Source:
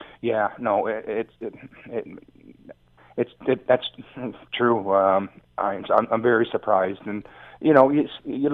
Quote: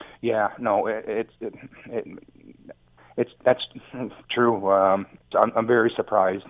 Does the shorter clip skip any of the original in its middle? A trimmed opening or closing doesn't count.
yes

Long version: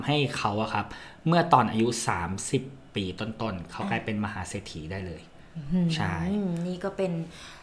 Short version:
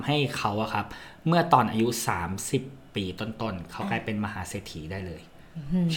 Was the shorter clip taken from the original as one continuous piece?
yes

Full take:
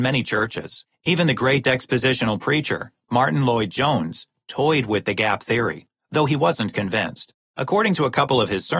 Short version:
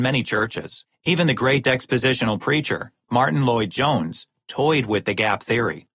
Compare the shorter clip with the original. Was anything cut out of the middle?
no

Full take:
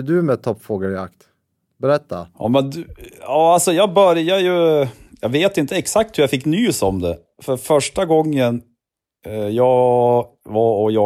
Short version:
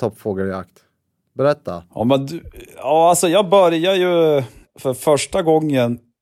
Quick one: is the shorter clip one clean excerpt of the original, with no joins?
no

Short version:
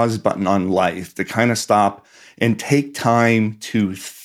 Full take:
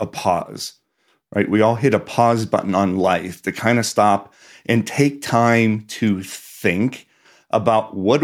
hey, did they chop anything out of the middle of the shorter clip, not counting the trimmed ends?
no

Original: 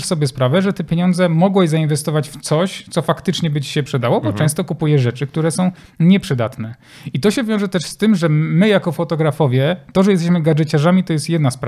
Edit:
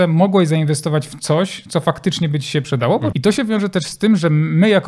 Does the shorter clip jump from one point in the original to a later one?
yes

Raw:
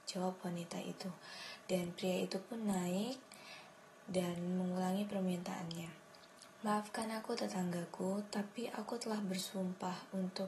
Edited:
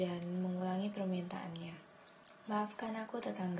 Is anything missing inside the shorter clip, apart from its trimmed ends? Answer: no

